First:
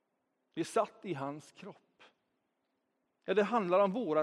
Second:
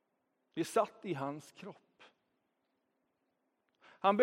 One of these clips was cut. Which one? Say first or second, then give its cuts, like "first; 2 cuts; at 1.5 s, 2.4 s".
first; 1 cut; at 3.1 s